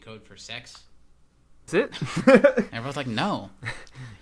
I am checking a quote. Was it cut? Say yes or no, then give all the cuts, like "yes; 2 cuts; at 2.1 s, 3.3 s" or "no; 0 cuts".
yes; 1 cut; at 1.7 s